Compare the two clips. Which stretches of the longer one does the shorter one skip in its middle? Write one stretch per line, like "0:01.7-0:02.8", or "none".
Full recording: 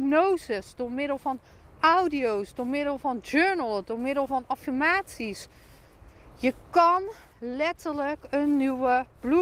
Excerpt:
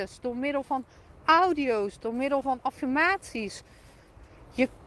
0:02.5-0:03.8